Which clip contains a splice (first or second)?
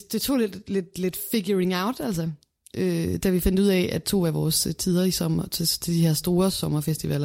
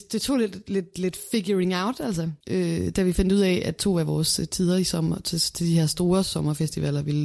second